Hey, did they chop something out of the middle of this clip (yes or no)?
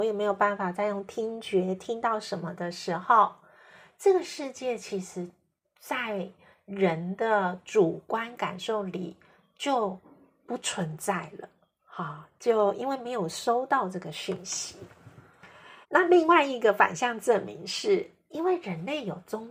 yes